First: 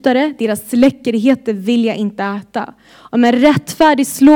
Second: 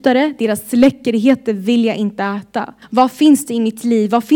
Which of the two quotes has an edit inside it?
second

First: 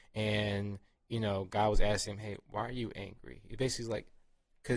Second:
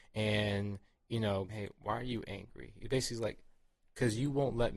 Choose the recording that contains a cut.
second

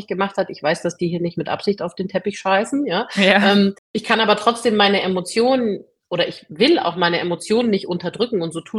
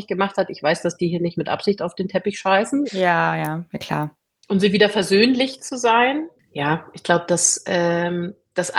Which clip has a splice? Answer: second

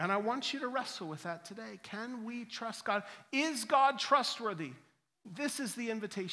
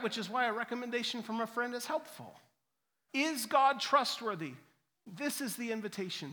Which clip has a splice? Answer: second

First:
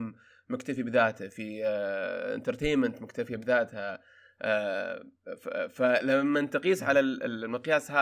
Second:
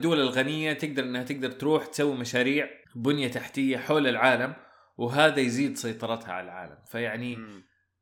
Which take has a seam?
second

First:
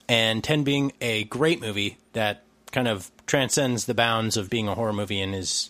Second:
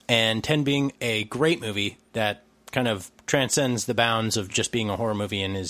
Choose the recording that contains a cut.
first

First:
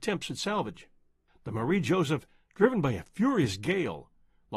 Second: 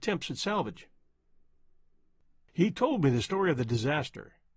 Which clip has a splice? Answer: first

